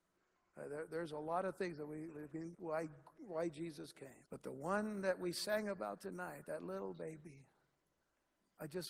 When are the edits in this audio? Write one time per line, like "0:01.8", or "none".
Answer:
0:02.5
0:04.3